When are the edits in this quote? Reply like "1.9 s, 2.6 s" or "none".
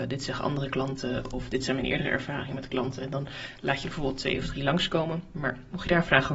5.3 s